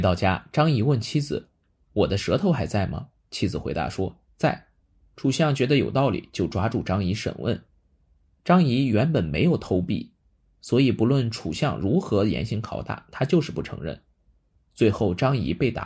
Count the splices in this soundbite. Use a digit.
1